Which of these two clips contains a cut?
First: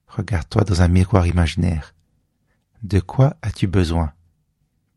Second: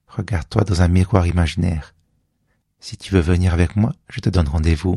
second; 1 cut; at 2.6 s

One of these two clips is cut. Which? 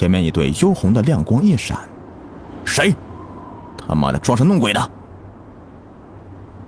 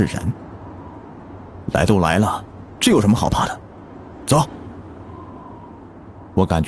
second; 1 cut; at 1.6 s

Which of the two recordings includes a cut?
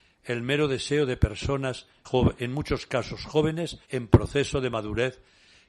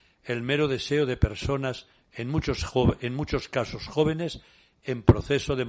first; 2 cuts; at 2.0 s, 3.8 s

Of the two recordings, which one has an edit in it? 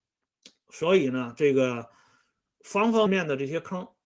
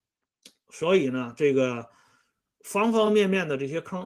first; 1 cut; at 3.1 s

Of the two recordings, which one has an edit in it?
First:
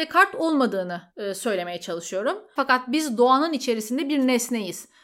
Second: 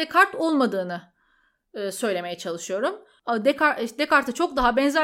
first; 2 cuts; at 1.1 s, 2.6 s

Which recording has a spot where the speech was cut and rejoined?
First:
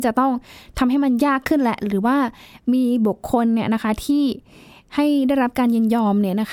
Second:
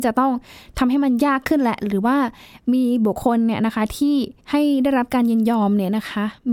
second; 2 cuts; at 3.2 s, 4.4 s

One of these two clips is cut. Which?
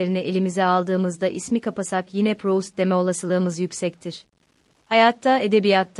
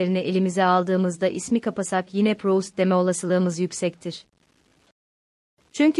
first; 1 cut; at 4.7 s

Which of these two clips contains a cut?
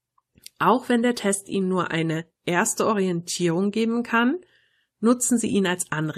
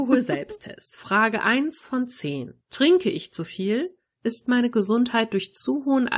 second; 1 cut; at 2.6 s

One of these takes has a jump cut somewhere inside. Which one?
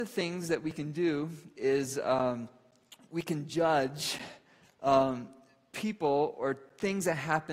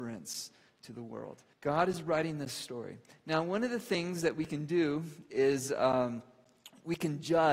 second; 1 cut; at 1.5 s

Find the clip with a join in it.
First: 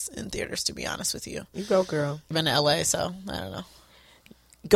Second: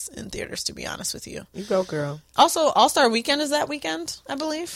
first; 1 cut; at 2.3 s

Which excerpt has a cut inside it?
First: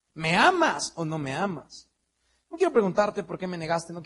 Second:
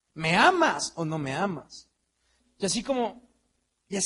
second; 1 cut; at 2.4 s

